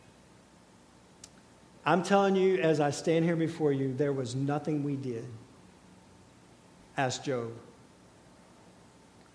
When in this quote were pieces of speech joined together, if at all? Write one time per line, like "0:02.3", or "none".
0:01.7
0:06.8